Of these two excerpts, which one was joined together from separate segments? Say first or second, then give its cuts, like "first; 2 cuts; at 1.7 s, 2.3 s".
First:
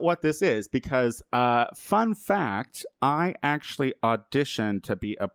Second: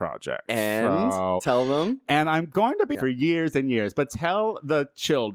second; 1 cut; at 2.9 s